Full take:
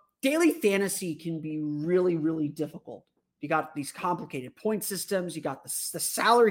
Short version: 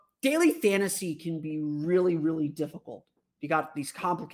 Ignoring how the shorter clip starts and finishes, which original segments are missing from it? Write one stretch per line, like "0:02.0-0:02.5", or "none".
none

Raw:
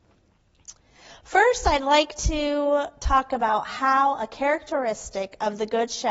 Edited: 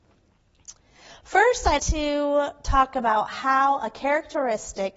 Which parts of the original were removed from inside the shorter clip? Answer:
0:01.8-0:02.2

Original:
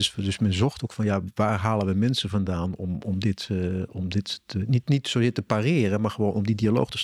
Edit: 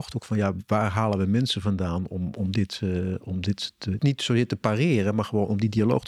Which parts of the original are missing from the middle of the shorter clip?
0:04.7-0:04.8

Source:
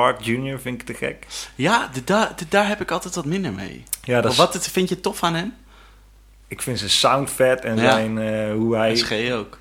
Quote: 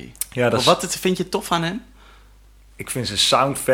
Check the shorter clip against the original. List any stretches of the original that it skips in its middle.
none

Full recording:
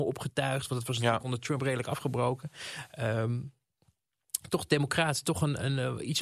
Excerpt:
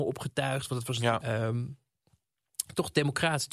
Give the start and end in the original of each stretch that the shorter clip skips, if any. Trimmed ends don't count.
0:01.2-0:03.0

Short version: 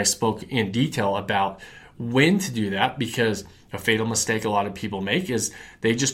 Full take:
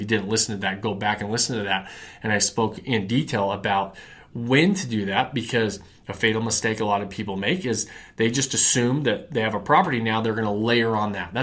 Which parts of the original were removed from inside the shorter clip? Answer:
none

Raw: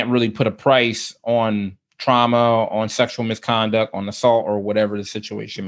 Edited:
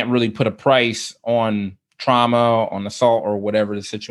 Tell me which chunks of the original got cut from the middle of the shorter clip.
0:02.7-0:03.9

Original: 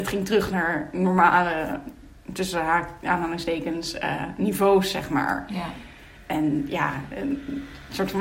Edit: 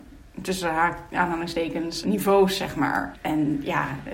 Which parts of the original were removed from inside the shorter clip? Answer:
0:03.9-0:04.4
0:05.5-0:06.2

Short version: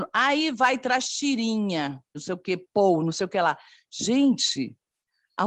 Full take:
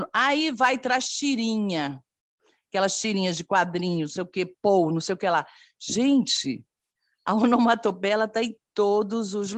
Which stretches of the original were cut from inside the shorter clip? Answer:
0:02.1-0:04.0

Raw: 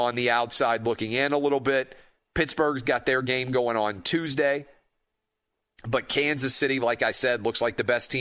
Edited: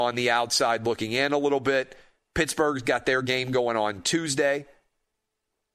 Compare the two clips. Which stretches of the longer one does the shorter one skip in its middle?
none

